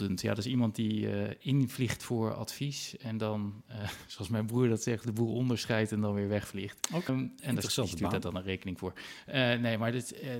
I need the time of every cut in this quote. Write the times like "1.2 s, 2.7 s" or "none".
7.1 s